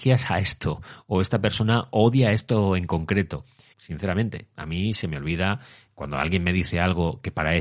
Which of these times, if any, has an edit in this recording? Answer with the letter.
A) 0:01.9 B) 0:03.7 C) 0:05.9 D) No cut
B